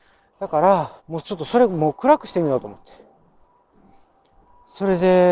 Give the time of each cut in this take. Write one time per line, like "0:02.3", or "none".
0:01.0